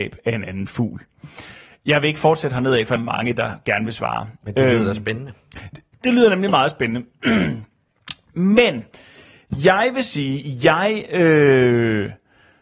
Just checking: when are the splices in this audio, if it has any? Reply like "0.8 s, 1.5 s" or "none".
3.0 s